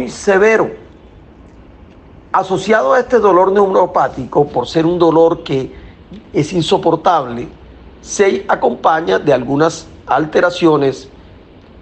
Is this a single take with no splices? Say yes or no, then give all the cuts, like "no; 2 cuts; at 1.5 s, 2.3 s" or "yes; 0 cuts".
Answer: yes; 0 cuts